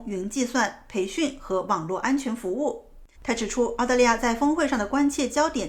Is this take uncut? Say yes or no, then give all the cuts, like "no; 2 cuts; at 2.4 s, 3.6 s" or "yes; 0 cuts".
no; 1 cut; at 3.1 s